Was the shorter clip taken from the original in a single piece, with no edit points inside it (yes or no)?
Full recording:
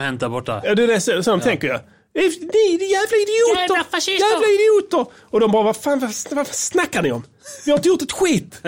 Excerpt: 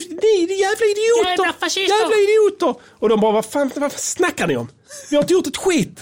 no